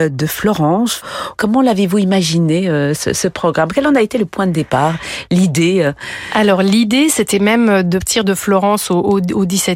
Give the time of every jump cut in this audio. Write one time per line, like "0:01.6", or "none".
0:08.0